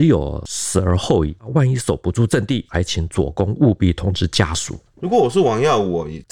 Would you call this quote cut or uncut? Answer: cut